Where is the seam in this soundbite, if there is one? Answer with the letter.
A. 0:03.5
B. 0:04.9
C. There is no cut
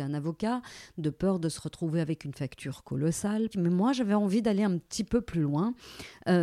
A